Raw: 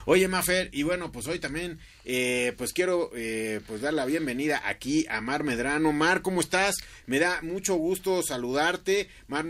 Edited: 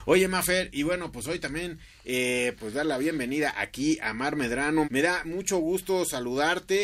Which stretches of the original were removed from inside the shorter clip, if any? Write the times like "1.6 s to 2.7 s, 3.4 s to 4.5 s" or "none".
2.6 s to 3.6 s, 5.9 s to 7.0 s